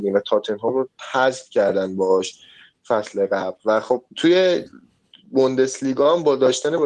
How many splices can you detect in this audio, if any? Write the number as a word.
one